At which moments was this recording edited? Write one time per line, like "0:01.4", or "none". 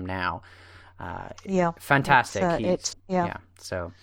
0:02.9